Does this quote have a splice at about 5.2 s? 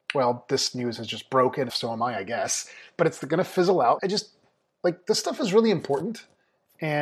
no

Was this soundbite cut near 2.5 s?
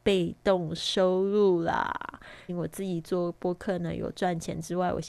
yes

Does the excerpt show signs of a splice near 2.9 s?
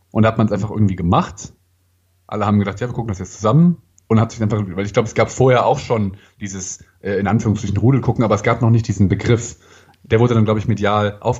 no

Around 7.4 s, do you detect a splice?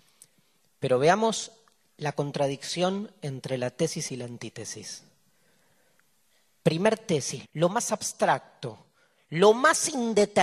yes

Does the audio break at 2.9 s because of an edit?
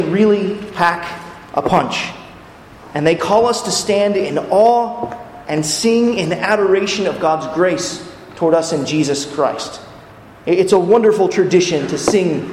no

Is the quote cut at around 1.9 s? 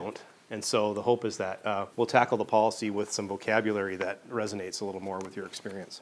yes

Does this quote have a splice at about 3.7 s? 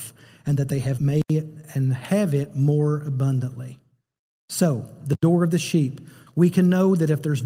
no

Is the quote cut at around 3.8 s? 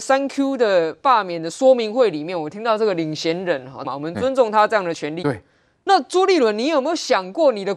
yes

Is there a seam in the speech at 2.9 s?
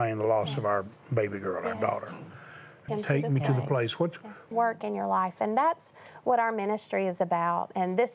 yes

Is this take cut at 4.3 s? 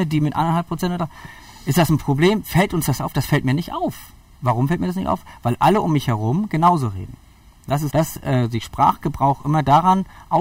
no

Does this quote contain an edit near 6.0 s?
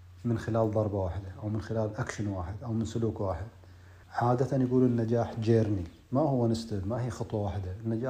yes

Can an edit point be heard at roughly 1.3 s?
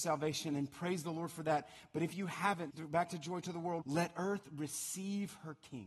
no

